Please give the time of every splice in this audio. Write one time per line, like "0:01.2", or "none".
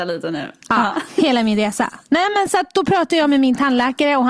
none